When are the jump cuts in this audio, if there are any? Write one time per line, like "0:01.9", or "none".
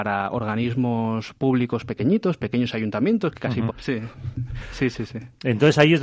0:03.7